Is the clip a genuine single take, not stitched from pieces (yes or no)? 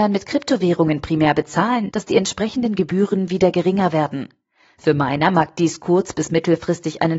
no